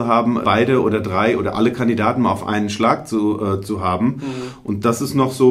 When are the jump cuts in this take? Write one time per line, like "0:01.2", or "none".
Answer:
none